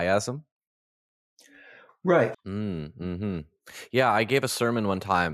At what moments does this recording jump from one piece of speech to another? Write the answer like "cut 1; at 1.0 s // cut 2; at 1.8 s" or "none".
cut 1; at 2.3 s